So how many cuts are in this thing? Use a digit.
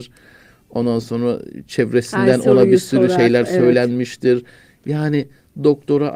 0